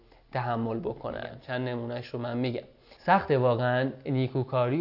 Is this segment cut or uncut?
cut